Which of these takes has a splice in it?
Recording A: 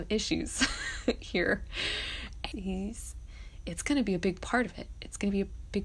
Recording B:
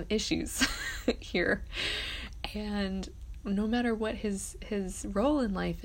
A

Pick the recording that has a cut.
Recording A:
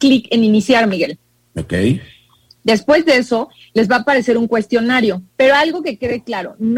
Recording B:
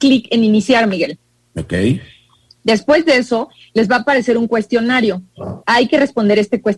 A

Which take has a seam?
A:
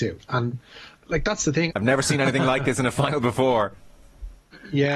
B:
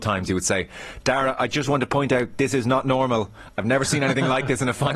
A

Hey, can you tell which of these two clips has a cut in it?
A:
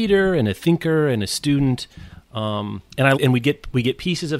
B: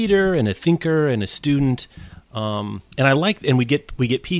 A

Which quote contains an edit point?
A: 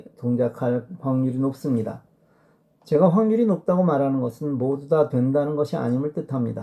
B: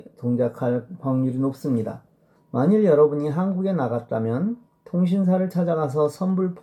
B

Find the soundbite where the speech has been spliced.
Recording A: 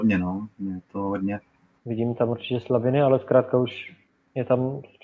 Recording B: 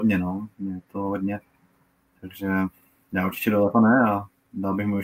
A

